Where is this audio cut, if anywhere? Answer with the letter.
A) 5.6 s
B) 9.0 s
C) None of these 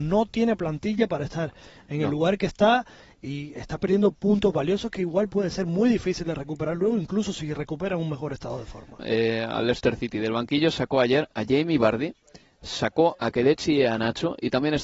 B